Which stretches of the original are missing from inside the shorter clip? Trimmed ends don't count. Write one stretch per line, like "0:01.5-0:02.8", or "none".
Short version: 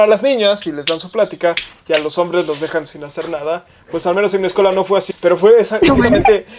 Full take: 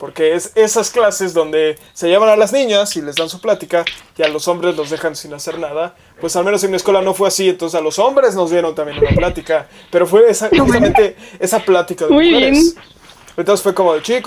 0:07.4-0:09.8

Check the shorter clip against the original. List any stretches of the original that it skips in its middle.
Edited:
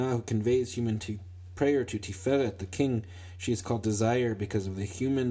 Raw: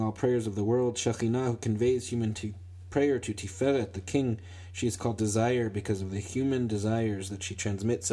none

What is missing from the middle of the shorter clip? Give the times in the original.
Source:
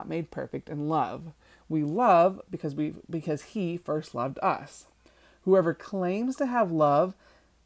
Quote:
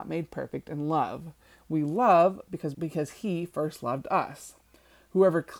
0:02.7-0:03.1

